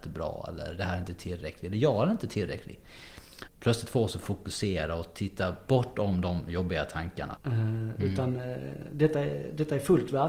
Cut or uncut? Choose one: cut